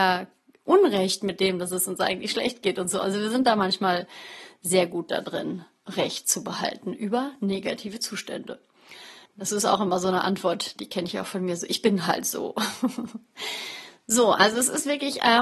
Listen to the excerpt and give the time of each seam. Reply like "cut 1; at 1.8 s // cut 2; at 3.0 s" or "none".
cut 1; at 9.3 s